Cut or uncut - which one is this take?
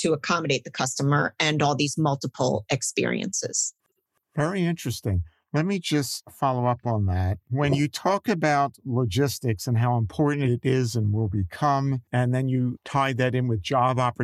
cut